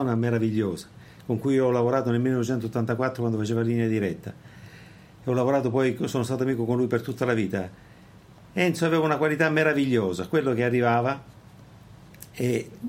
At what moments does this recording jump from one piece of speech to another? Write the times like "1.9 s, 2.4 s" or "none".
none